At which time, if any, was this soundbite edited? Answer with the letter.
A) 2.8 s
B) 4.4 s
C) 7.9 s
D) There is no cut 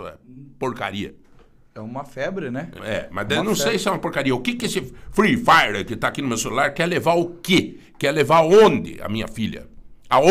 A